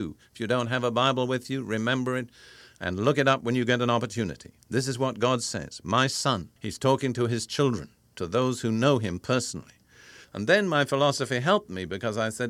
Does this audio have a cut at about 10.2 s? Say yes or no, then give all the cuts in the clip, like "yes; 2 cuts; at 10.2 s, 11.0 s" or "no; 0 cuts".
yes; 2 cuts; at 6.6 s, 10.2 s